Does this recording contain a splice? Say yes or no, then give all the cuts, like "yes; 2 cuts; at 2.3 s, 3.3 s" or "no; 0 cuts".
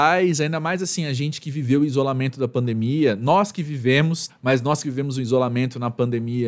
yes; 1 cut; at 4.3 s